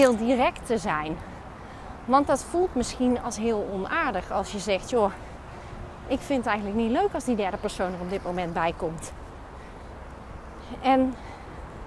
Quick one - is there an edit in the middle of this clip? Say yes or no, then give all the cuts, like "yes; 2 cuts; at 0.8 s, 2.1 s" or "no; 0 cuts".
no; 0 cuts